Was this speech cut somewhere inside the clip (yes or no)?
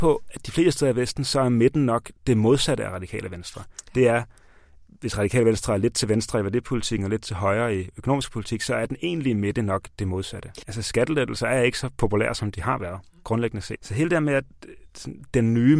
yes